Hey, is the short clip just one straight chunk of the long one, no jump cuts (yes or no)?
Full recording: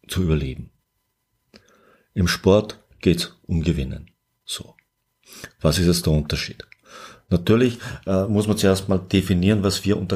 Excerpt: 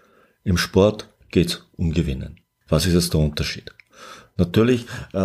no